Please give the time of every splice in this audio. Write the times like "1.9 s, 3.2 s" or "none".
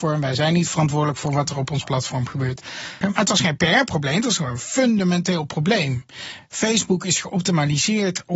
3.0 s